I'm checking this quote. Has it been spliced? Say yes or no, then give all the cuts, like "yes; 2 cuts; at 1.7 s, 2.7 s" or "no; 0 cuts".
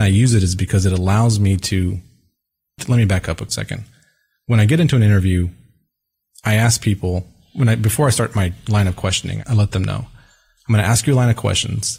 no; 0 cuts